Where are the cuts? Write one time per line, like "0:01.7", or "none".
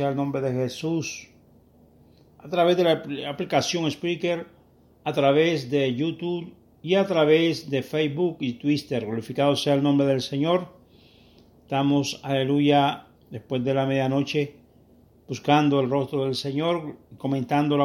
0:13.2

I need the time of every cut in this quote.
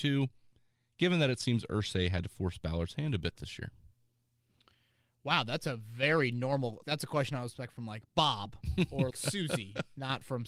0:06.8
0:09.1

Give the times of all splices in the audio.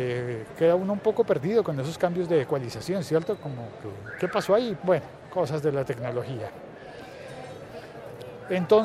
0:04.8

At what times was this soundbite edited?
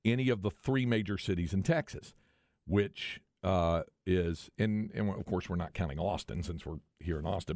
none

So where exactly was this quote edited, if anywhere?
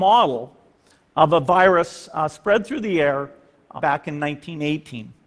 0:03.8

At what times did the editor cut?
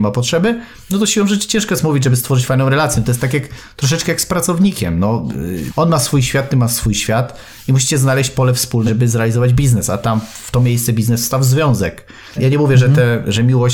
0:05.7
0:08.9
0:12.4

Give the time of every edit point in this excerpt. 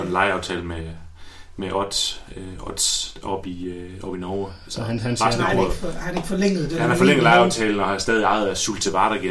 none

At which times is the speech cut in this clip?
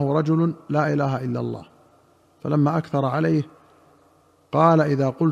none

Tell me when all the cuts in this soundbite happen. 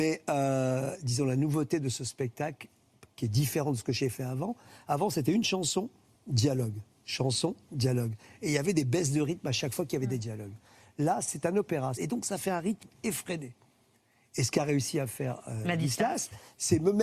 0:12.0

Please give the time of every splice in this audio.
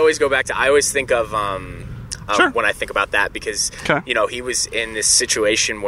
0:02.3

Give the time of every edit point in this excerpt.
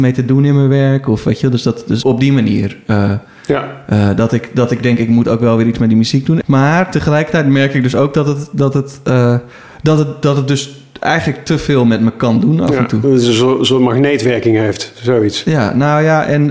0:02.0
0:06.4

